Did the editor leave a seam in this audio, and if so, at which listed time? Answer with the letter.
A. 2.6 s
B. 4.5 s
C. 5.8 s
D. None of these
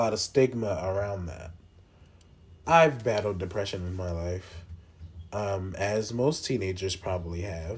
A